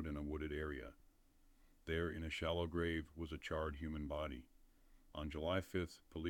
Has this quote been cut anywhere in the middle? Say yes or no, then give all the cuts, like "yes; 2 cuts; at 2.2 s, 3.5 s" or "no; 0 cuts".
no; 0 cuts